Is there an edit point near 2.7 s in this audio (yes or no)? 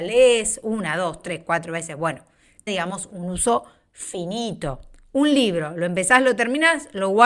yes